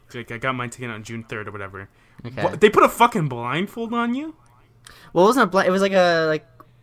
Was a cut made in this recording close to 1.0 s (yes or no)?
yes